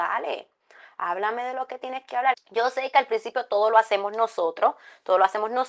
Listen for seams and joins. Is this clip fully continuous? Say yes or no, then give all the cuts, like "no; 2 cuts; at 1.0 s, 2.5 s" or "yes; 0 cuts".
no; 1 cut; at 2.3 s